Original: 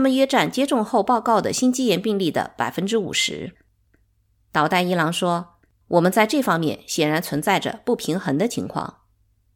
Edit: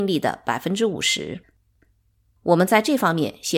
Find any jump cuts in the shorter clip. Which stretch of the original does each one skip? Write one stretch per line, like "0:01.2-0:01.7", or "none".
0:04.4-0:05.7

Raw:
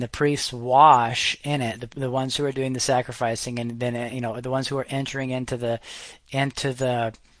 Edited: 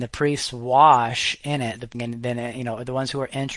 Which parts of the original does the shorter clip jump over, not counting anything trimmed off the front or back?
0:01.9-0:03.5

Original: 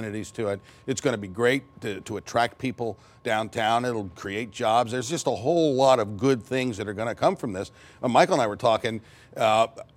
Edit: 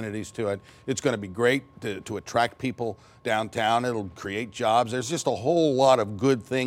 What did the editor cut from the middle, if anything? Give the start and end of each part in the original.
none

